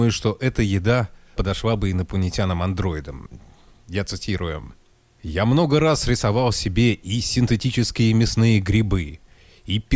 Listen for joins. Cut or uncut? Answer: uncut